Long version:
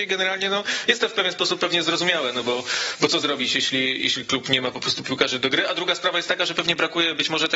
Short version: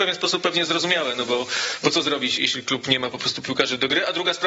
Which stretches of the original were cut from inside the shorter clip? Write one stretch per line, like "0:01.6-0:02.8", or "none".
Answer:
0:03.5-0:04.0

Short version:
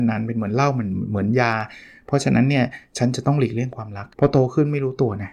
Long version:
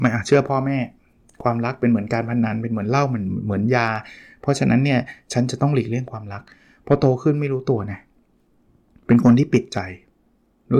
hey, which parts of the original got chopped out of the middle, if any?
0:06.5-0:06.8

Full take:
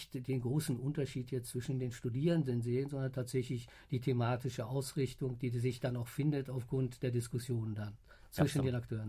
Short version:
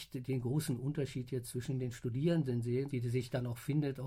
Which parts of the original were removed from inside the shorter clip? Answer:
0:02.9-0:05.4

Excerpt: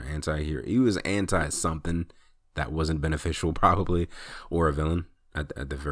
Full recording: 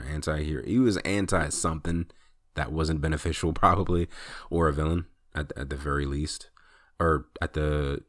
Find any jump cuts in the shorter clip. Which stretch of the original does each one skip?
none

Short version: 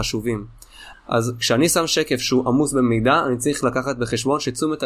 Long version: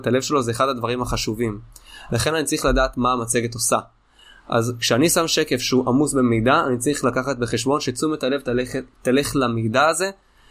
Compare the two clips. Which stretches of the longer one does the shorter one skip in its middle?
0:02.1-0:04.3

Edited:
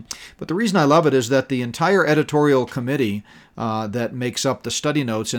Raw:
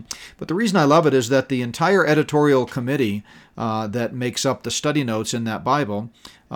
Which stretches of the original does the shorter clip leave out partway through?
none

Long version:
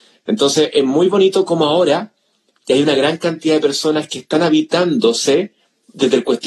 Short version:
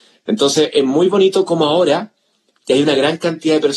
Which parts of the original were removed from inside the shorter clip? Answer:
none

